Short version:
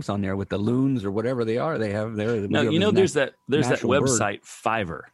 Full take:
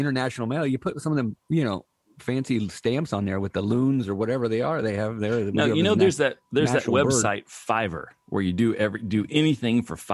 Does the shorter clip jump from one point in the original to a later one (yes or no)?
no